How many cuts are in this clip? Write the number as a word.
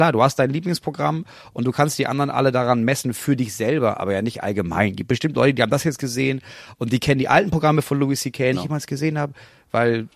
one